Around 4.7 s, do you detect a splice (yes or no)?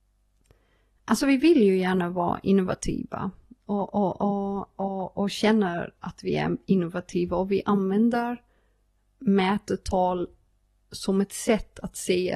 no